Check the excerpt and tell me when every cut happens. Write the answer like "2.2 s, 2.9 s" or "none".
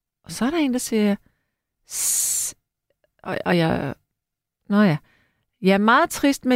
none